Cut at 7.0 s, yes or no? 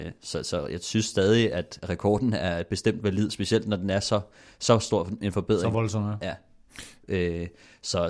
yes